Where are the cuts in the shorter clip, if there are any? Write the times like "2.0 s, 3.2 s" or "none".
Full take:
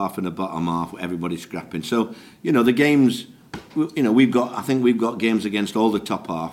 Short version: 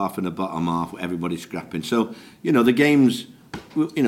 none